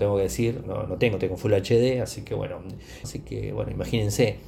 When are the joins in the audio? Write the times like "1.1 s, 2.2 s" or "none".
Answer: 3.0 s